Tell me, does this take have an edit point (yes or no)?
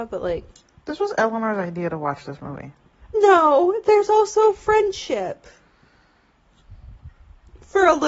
yes